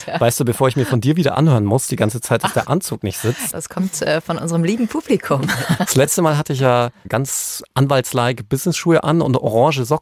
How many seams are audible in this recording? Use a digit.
2